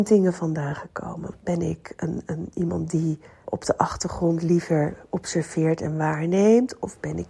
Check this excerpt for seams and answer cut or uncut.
cut